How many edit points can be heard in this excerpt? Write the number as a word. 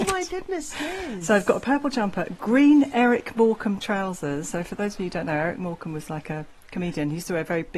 zero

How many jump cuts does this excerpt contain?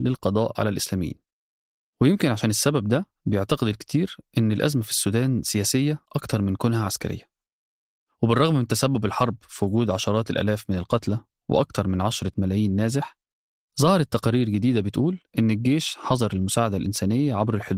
zero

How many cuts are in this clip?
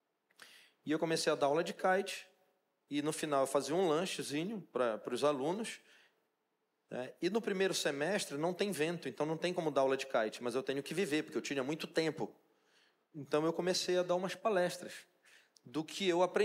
zero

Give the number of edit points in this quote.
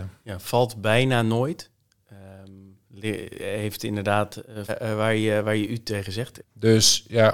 two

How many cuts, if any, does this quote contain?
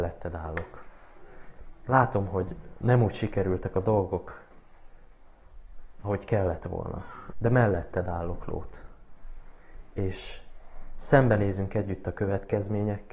one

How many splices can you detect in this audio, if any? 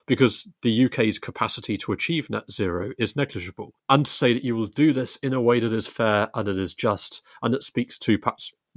one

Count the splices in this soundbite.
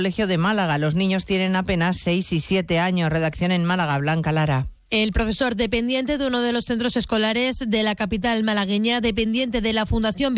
zero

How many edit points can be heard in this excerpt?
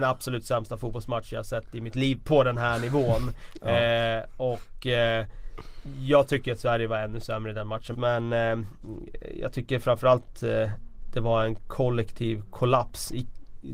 one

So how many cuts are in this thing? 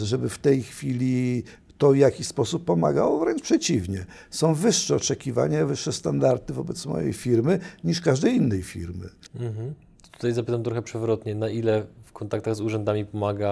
one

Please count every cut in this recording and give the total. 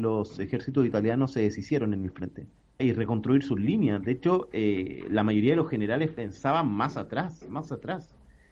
one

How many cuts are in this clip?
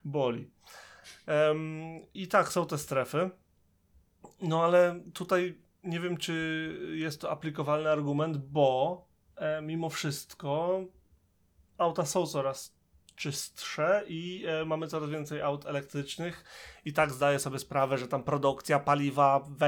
one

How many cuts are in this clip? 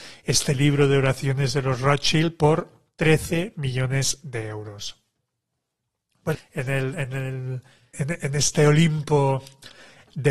two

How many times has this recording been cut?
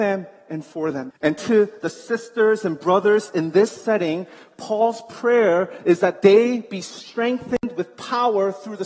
one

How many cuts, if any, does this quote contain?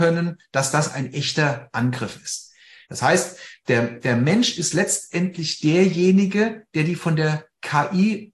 one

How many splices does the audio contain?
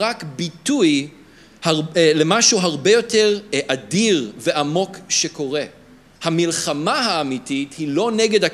one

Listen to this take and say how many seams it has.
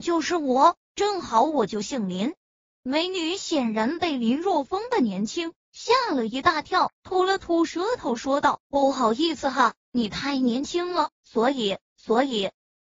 one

